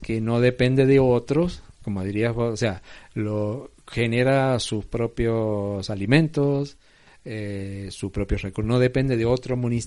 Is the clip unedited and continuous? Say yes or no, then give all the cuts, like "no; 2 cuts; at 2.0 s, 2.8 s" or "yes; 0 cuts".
yes; 0 cuts